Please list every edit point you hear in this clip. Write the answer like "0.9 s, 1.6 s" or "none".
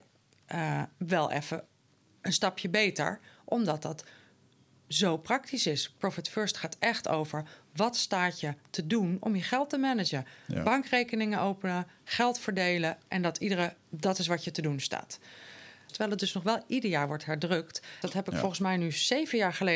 13.8 s, 15.9 s, 18.0 s